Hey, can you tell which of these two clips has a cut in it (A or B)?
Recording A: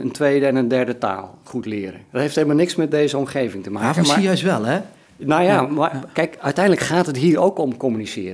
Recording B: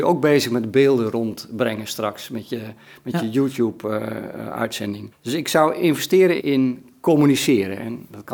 B